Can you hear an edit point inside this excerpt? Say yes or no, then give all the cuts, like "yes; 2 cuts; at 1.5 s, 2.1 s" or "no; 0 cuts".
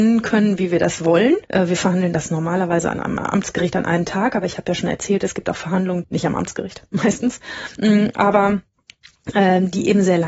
yes; 2 cuts; at 1.4 s, 6.0 s